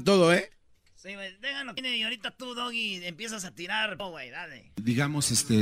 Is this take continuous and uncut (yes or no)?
yes